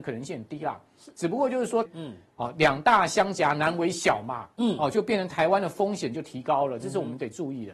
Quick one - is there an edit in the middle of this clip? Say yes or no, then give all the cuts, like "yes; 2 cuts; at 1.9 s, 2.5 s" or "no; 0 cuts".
yes; 1 cut; at 1.8 s